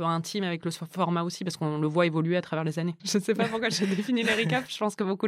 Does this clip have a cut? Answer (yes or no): yes